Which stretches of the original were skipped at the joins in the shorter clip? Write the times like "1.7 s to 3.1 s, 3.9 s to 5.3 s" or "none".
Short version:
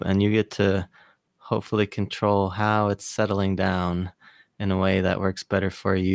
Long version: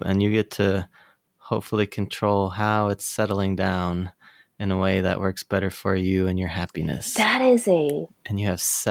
none

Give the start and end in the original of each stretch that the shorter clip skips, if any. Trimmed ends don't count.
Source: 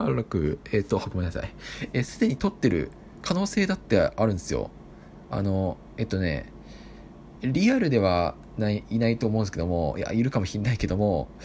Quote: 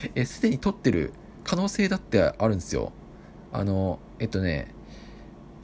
none

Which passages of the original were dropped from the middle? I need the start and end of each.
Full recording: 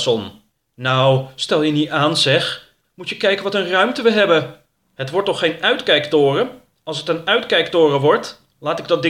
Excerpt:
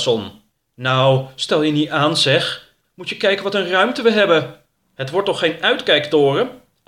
none

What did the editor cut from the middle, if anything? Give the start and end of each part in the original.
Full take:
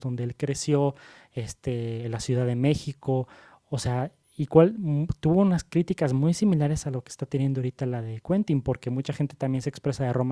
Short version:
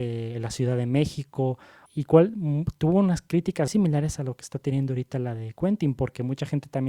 3.6 s to 4.3 s, 6.1 s to 6.3 s

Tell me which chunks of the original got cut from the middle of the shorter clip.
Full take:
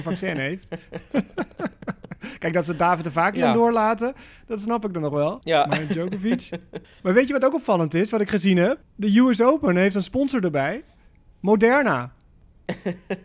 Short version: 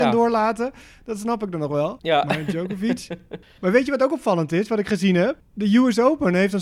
none

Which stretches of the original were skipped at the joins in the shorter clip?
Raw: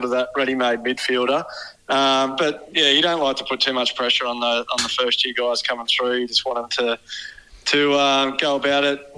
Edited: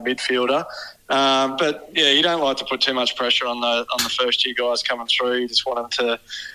none

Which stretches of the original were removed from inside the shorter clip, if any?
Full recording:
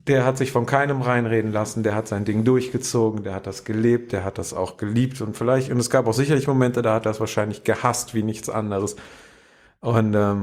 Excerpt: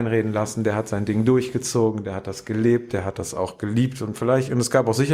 none

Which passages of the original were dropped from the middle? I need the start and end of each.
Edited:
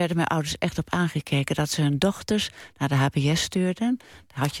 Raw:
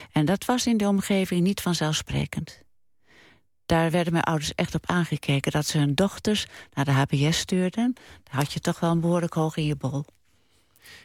none

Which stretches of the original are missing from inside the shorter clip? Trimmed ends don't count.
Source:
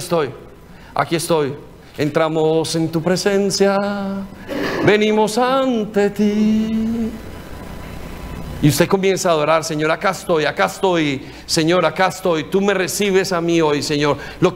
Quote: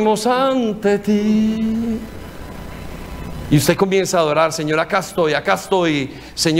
none

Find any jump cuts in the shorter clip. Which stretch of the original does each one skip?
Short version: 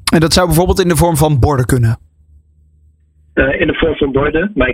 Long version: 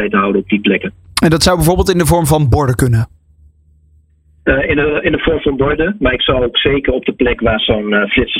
4.7 s to 5.0 s

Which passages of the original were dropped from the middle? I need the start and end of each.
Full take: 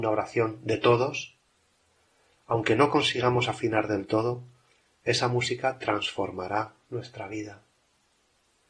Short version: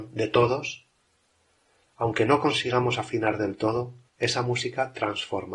4.6 s to 4.9 s

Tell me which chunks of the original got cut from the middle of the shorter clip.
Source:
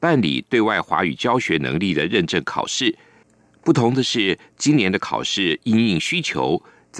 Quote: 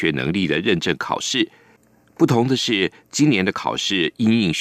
none

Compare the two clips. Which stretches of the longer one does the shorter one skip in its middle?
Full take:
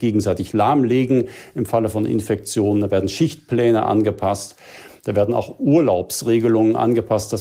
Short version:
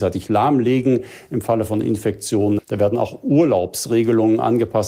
2.8 s to 4.9 s

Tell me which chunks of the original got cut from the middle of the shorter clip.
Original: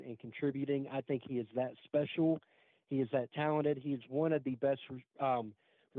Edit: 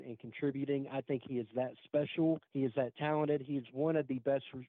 2.5 s to 2.8 s

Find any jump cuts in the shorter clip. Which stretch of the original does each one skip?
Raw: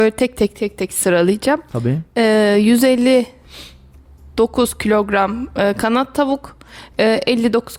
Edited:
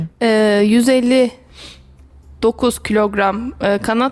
none

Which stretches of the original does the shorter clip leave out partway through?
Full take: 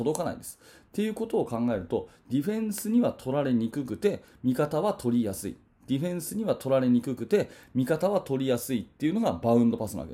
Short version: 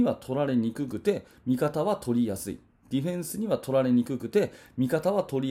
none

